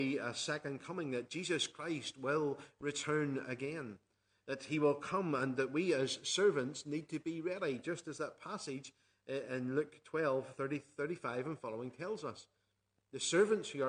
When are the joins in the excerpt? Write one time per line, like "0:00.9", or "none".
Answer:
0:13.0